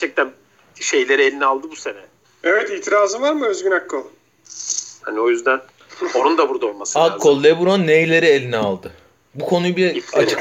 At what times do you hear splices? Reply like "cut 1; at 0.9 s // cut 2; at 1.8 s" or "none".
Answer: cut 1; at 2.2 s // cut 2; at 5.0 s